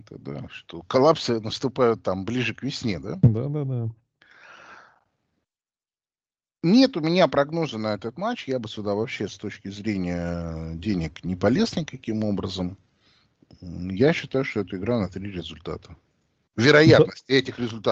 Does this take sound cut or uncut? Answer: uncut